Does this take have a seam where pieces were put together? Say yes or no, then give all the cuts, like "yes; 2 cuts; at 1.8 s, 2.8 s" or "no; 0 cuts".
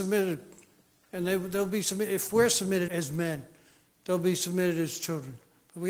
yes; 1 cut; at 2.9 s